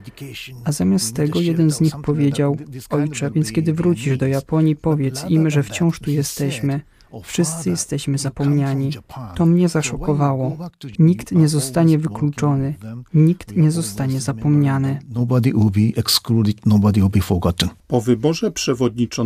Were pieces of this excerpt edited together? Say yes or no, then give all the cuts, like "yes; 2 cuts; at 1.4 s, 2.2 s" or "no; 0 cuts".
yes; 2 cuts; at 3.3 s, 10.9 s